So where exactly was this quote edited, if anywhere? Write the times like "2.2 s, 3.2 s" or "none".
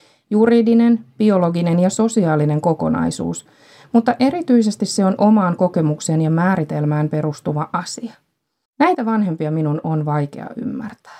8.6 s